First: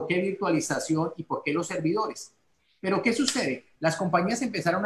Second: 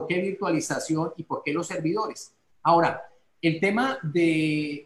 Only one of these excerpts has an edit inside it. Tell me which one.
second; 1 cut; at 2.5 s

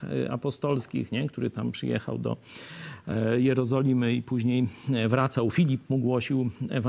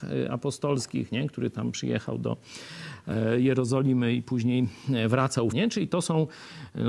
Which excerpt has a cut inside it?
second; 1 cut; at 5.5 s

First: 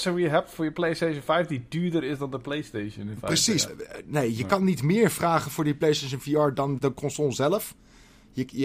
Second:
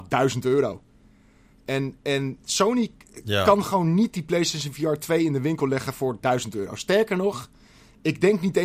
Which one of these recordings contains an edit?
first; 2 cuts; at 3.7 s, 6.8 s

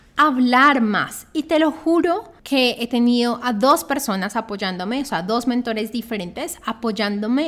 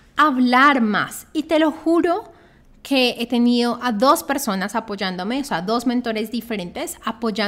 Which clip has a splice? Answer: first; 1 cut; at 2.4 s

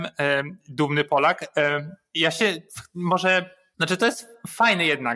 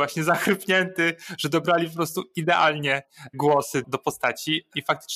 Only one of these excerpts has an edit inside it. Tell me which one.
second; 1 cut; at 3.8 s

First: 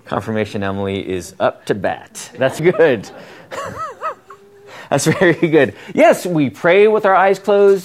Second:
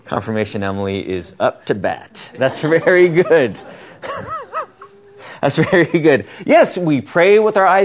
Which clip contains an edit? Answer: first; 1 cut; at 2.6 s

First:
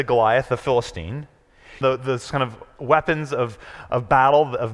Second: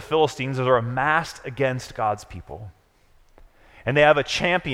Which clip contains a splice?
first; 1 cut; at 1.8 s

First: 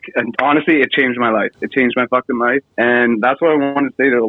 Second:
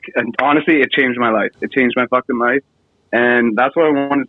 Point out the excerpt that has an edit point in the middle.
first; 1 cut; at 2.7 s

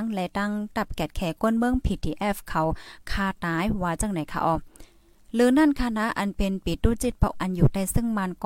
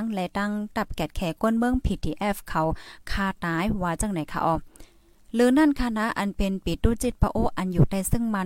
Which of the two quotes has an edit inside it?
first; 1 cut; at 7.3 s

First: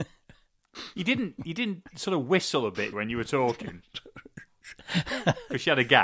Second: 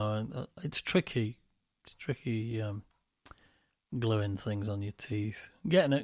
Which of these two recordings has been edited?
first; 1 cut; at 2.9 s

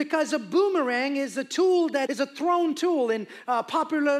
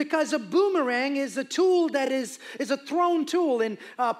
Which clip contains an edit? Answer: first; 1 cut; at 2.1 s

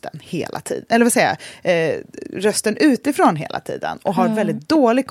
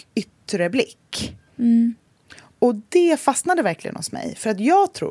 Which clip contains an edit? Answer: second; 1 cut; at 1.5 s

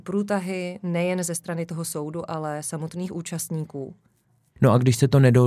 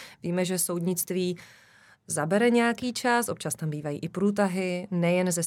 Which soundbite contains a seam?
first; 1 cut; at 4.6 s

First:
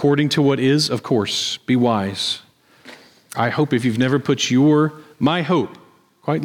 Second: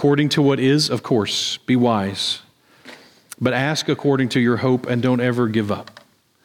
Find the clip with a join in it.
first; 1 cut; at 3.3 s

